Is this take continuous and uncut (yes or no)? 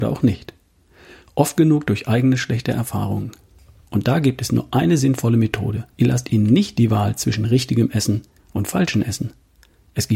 no